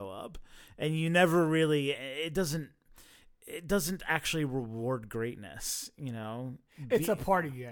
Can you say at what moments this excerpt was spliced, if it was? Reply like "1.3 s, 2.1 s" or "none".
none